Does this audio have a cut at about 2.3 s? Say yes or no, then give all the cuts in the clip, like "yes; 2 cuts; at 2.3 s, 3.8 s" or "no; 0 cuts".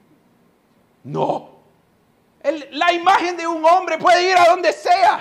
yes; 1 cut; at 2.3 s